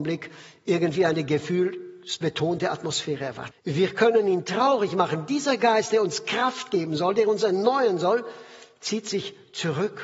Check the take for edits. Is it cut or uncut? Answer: cut